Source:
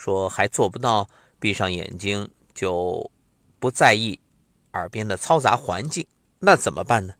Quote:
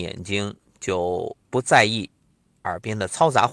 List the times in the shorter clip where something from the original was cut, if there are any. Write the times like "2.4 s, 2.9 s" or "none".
1.4 s